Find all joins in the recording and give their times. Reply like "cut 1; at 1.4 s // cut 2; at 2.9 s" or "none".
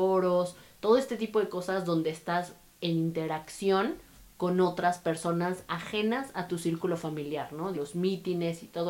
cut 1; at 7.7 s